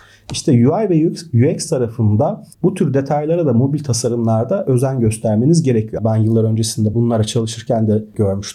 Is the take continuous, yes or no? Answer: no